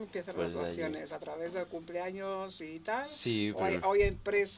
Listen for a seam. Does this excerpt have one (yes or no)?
no